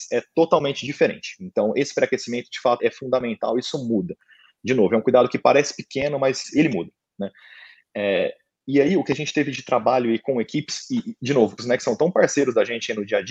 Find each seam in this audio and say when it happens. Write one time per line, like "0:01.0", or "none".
0:02.8
0:11.6